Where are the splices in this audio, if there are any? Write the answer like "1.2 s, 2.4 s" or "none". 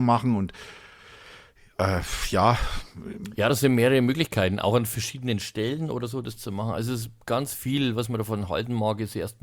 none